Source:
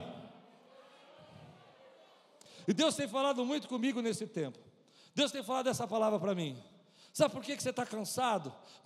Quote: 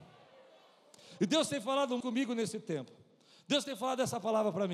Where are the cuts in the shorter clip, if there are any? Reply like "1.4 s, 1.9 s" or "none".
2.0 s